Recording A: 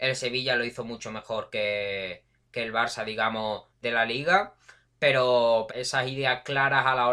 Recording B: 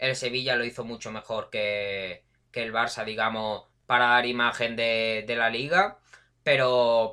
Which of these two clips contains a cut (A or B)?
A